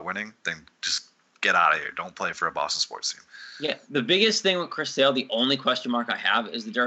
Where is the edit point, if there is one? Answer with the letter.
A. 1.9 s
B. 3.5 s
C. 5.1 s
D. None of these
D